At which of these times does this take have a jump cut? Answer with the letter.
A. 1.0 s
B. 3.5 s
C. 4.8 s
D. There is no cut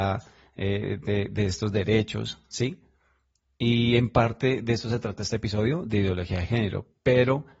D